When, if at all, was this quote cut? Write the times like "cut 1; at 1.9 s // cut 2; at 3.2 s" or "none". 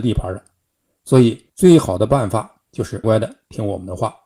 cut 1; at 1.5 s // cut 2; at 3.0 s